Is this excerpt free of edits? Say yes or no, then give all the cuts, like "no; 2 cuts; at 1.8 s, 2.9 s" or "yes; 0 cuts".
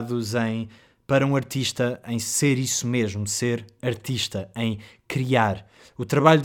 yes; 0 cuts